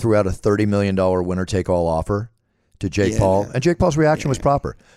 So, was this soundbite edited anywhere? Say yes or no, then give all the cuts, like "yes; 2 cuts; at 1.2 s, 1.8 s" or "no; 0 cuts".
no; 0 cuts